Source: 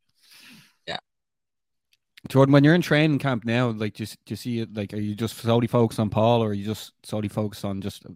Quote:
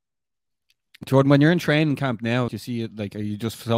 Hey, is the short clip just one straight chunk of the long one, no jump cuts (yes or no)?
no